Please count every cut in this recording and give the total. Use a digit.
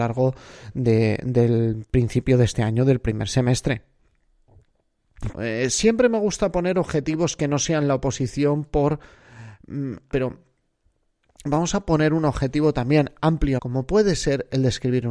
3